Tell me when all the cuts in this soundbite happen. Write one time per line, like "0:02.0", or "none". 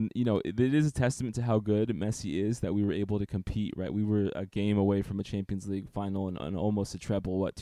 none

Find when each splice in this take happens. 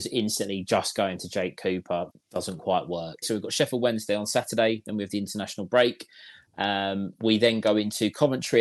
0:02.1
0:03.2

